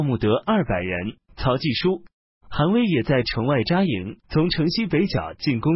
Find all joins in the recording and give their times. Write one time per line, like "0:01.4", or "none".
0:01.3
0:04.2